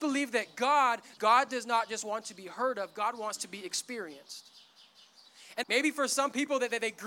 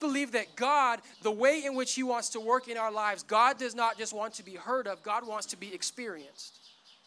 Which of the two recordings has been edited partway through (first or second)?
first